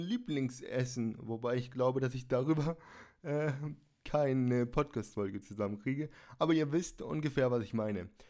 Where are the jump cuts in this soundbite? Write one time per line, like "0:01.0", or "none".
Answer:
none